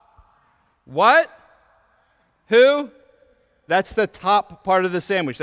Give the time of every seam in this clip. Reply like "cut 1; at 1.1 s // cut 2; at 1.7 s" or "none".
cut 1; at 3.7 s

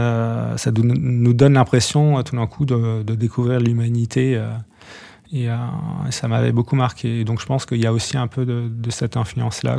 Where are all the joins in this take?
none

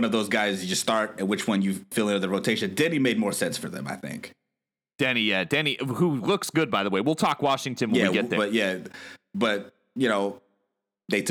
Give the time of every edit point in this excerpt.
cut 1; at 8.4 s

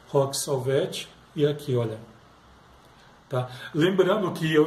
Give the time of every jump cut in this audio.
none

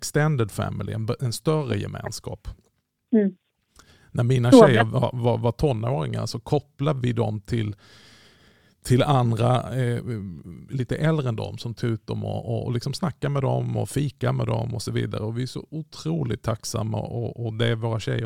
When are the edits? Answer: cut 1; at 10.7 s

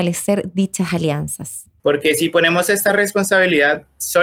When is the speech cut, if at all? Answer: cut 1; at 1.8 s

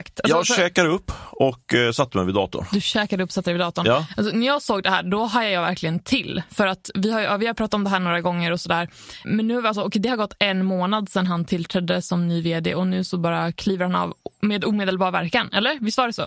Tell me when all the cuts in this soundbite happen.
cut 1; at 9.2 s

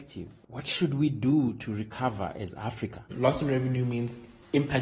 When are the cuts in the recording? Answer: cut 1; at 3.1 s

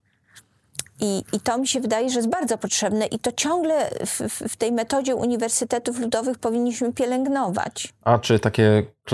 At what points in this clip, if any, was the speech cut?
none

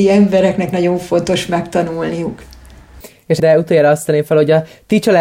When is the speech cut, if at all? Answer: cut 1; at 3.4 s

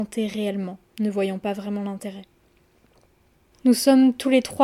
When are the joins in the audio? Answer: cut 1; at 3.5 s

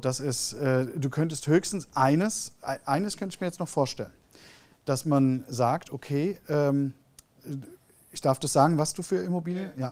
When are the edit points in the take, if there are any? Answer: none

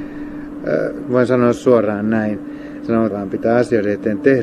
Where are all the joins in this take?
cut 1; at 1.0 s // cut 2; at 3.1 s

